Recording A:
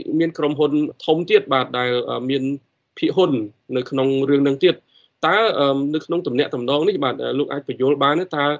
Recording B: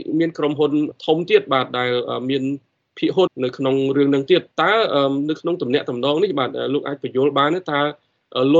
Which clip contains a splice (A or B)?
B